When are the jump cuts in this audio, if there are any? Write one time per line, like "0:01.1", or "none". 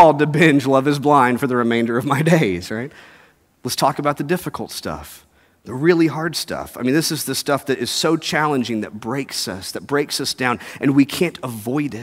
none

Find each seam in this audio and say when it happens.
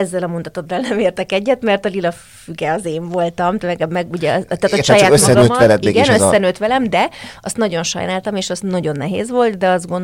none

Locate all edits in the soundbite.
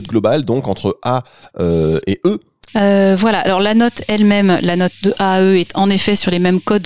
0:02.7

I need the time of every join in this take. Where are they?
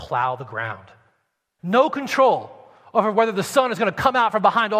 0:01.6

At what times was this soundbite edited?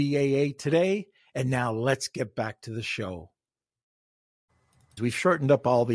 0:05.0

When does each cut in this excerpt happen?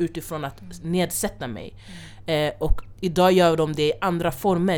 none

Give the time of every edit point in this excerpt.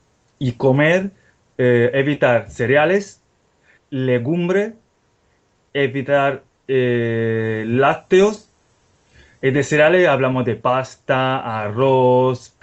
0:03.8

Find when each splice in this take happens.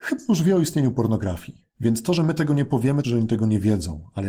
0:01.7
0:03.0

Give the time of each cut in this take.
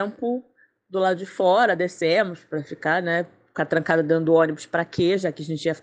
none

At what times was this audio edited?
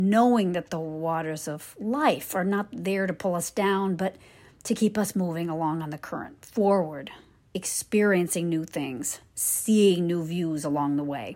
none

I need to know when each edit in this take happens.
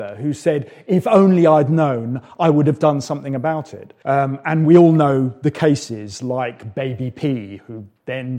0:04.0

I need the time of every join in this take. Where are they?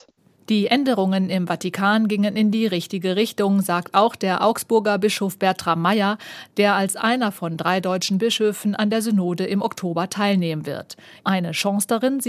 0:11.2

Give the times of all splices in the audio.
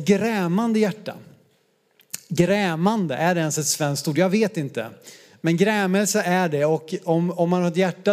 none

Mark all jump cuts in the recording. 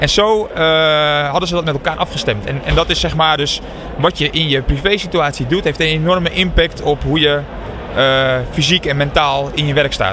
none

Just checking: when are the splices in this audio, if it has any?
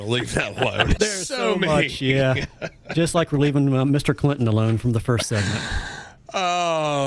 0:01.0

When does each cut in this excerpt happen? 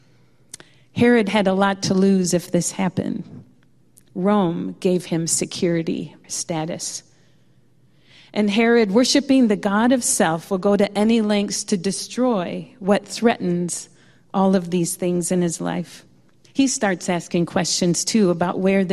0:06.2
0:16.4

